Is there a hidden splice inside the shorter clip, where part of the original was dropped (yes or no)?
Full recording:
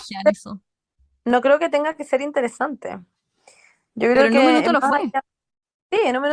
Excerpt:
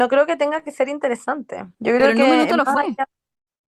yes